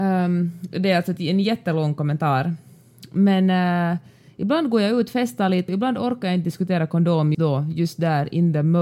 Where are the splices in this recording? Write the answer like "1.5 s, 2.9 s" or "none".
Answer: 5.7 s, 7.3 s